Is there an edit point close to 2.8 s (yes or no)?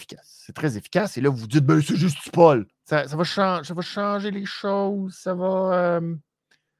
yes